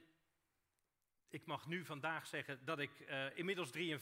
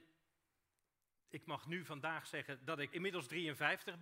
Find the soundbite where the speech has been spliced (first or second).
second